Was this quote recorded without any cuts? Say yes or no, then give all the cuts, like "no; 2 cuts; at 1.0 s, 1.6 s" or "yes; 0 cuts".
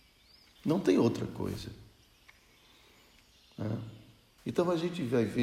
no; 1 cut; at 4.4 s